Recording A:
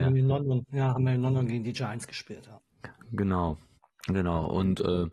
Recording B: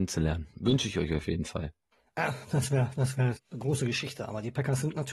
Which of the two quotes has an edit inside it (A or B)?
B